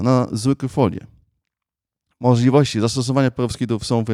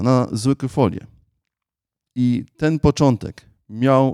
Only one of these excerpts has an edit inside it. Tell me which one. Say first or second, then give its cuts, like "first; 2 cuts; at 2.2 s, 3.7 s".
second; 1 cut; at 2.1 s